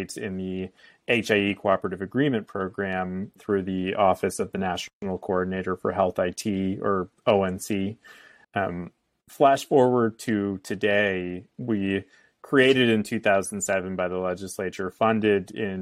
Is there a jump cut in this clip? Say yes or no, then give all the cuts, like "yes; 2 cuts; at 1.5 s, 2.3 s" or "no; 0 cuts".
yes; 3 cuts; at 3.4 s, 8.4 s, 11.5 s